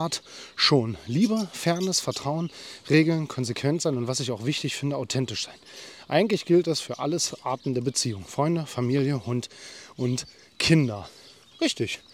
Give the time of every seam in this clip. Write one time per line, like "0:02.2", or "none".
none